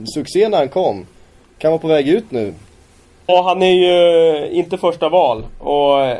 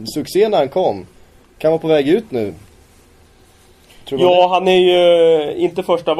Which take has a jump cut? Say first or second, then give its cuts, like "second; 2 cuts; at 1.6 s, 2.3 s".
first; 1 cut; at 3.3 s